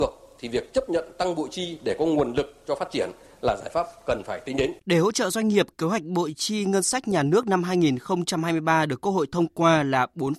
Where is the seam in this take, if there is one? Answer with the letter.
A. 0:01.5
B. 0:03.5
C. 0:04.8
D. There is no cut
C